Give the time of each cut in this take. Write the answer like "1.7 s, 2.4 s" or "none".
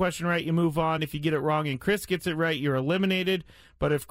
none